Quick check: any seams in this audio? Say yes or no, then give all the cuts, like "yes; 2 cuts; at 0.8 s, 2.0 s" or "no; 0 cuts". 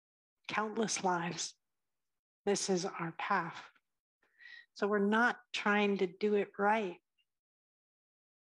no; 0 cuts